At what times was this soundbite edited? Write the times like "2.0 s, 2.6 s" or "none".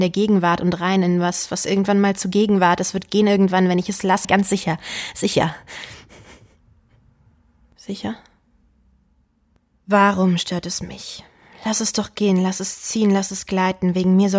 4.2 s